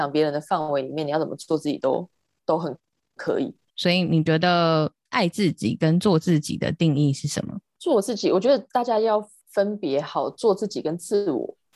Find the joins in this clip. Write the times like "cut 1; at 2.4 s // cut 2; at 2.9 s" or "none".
cut 1; at 3.7 s